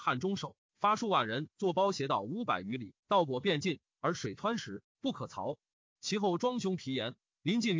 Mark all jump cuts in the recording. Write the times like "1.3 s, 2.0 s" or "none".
3.0 s